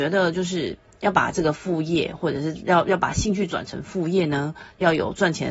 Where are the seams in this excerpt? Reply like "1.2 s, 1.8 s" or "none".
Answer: none